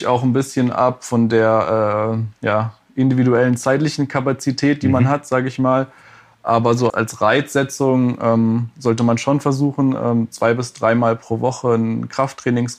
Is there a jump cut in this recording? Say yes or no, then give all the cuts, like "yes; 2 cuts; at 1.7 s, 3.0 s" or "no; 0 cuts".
yes; 1 cut; at 6.9 s